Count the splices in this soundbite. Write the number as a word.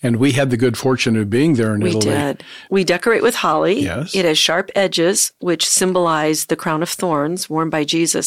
one